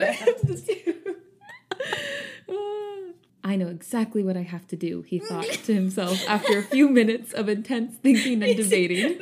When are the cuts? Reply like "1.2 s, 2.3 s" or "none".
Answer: 3.3 s